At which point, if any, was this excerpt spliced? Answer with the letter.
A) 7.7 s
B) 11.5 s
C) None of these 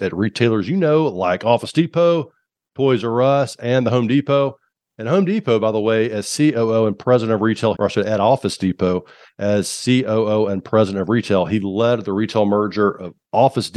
A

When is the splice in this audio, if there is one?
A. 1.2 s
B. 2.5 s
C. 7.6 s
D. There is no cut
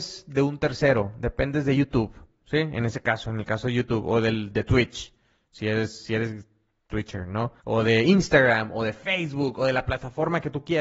C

